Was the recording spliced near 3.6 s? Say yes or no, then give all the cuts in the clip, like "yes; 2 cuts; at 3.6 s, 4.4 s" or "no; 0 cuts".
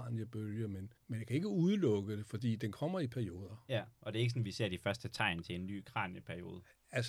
no; 1 cut; at 1.0 s